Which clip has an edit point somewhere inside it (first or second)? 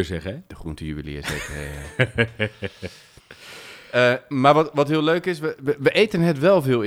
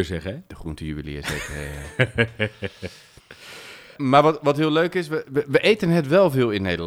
second